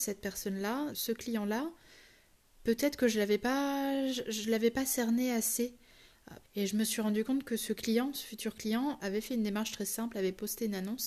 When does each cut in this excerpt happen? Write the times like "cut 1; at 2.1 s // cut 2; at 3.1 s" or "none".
cut 1; at 0.9 s // cut 2; at 6.4 s // cut 3; at 9.0 s